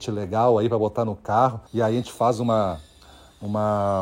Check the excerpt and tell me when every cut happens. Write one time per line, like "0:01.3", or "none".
0:01.7